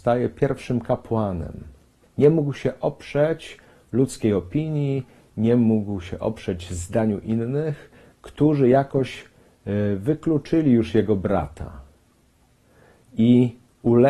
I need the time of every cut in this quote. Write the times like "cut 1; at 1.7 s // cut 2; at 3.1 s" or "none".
cut 1; at 2.0 s